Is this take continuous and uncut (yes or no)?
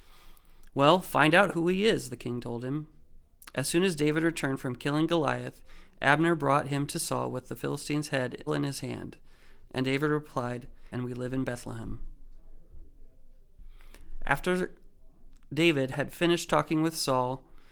no